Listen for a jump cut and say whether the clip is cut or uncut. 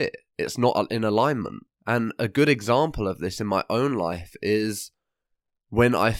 uncut